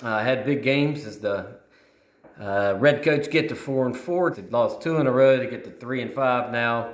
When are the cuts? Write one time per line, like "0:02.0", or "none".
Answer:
0:04.3